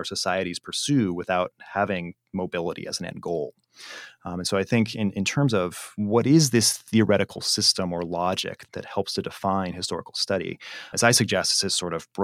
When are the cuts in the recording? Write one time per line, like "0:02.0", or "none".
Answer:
0:10.9

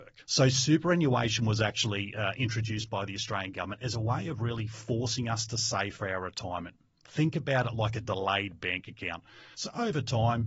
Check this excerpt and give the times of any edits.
0:09.5

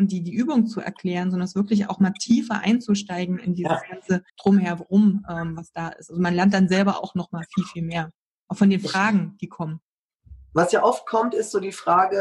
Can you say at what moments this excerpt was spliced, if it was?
0:04.3

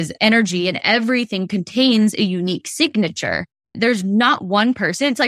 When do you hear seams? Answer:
0:03.7

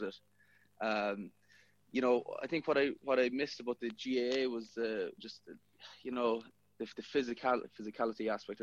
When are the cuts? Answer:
0:05.2

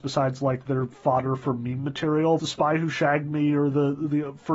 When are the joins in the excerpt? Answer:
0:02.4

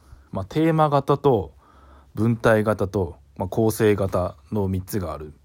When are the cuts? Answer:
none

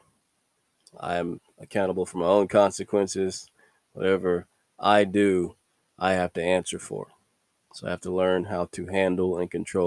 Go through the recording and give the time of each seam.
none

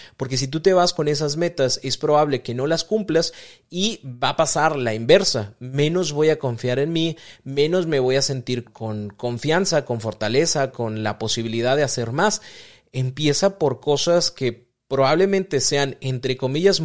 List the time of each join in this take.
0:08.7
0:10.7

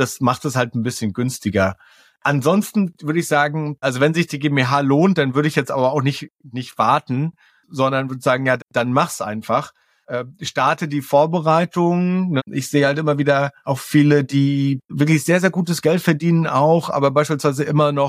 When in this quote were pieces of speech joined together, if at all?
0:03.8
0:08.6
0:12.4

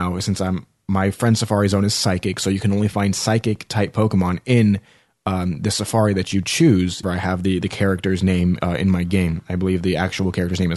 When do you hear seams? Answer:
0:07.0

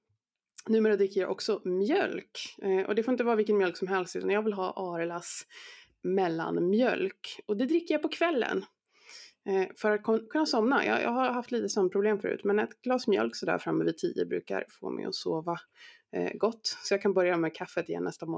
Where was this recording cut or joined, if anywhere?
none

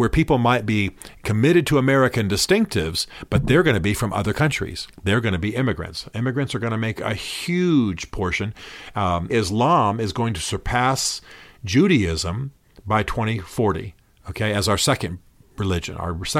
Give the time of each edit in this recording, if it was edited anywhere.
0:04.9
0:09.3

